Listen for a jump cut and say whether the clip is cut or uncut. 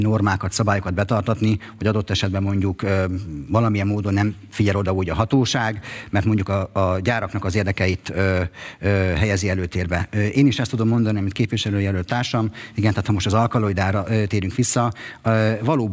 uncut